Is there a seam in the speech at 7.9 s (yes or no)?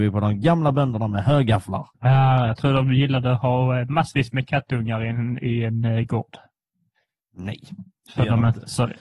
no